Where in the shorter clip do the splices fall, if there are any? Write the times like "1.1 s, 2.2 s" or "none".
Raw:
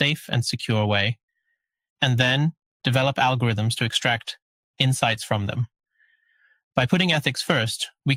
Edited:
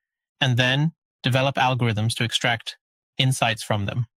none